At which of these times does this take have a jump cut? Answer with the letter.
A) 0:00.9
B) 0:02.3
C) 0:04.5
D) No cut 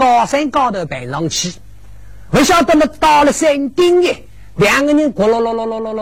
D